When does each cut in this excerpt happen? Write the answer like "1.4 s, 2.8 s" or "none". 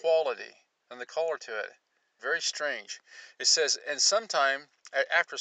2.2 s

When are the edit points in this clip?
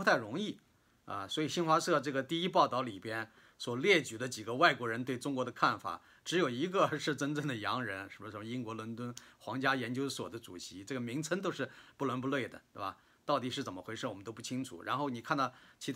none

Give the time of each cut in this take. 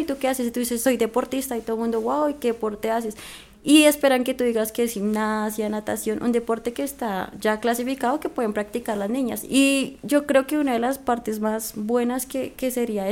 9.4 s

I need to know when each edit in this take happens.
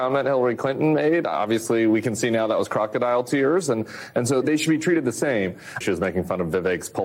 4.4 s, 5.8 s

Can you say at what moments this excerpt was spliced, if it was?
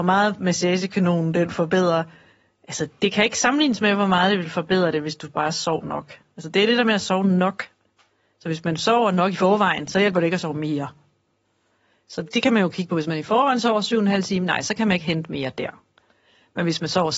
none

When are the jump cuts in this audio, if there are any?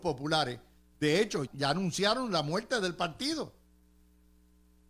1.5 s

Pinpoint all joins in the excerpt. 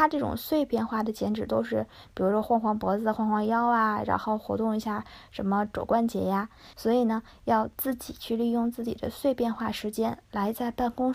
6.7 s

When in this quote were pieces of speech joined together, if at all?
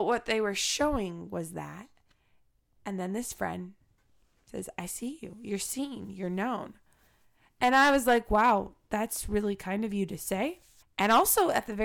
10.8 s

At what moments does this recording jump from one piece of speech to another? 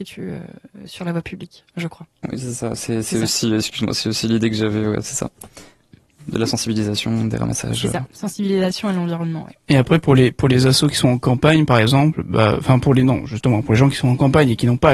none

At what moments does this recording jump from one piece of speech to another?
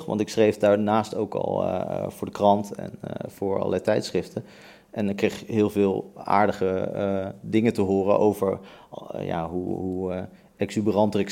none

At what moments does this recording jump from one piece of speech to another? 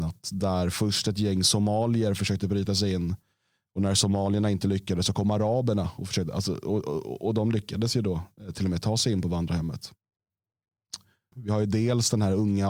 11.3 s

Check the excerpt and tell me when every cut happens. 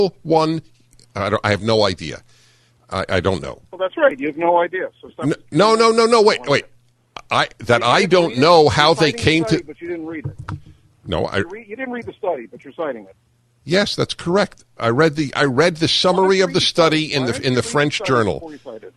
none

